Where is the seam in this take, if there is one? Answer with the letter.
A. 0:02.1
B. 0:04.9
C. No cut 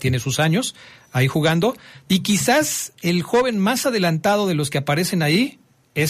A